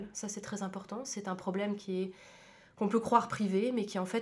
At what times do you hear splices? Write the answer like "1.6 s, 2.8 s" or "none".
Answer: none